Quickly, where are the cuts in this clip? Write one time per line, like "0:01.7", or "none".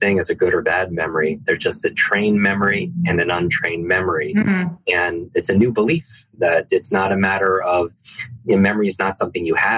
none